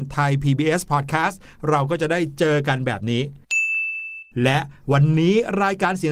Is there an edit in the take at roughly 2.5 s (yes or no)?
no